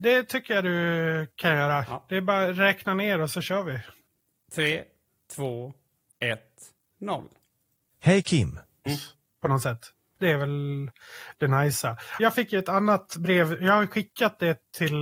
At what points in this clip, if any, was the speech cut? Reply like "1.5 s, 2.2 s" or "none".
8.9 s, 12.2 s